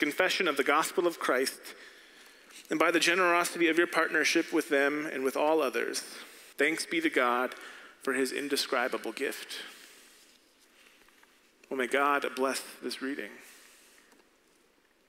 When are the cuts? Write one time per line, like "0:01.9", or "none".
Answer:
0:06.5